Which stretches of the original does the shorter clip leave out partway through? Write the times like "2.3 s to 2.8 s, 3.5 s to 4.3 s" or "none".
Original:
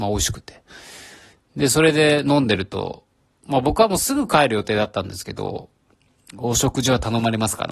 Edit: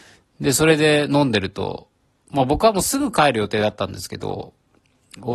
none